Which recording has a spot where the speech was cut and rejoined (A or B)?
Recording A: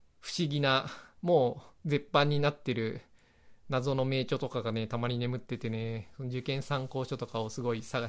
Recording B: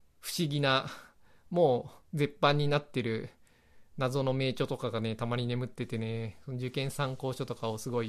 A